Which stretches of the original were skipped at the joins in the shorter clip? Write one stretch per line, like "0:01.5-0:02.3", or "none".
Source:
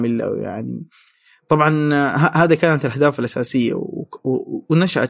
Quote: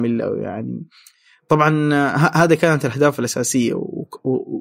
none